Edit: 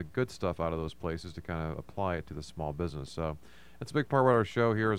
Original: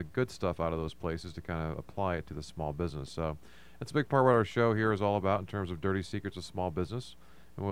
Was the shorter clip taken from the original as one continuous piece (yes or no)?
yes